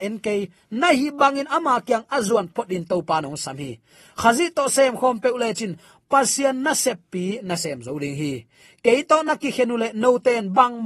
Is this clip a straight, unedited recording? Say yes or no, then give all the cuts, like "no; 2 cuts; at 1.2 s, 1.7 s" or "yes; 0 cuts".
no; 1 cut; at 2.5 s